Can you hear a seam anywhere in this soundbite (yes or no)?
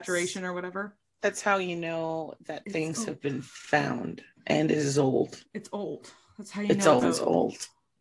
yes